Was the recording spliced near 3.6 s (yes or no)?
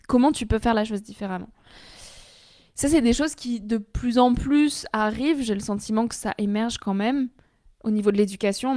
no